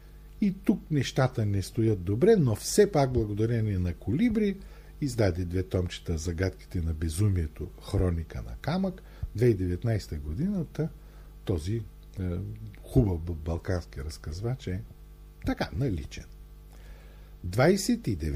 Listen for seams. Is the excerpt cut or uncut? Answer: uncut